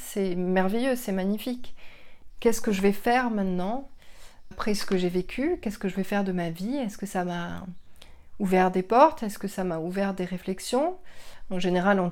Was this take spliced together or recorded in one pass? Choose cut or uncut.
cut